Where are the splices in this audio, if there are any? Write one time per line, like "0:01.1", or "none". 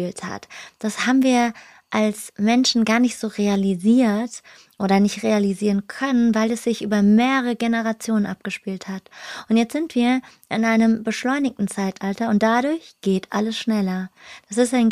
none